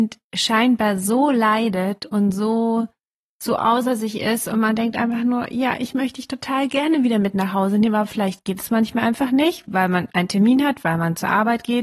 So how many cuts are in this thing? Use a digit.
0